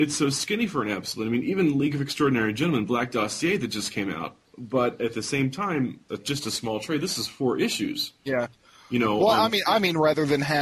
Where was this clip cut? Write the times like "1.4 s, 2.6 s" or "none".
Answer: 4.4 s, 6.1 s